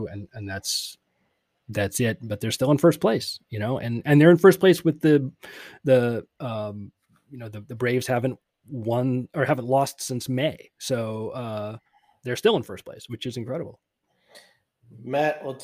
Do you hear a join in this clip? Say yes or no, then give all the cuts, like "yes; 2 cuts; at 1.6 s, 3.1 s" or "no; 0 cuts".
no; 0 cuts